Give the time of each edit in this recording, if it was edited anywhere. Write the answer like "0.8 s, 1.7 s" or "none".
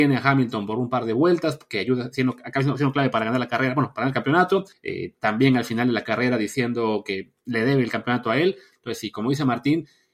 4.7 s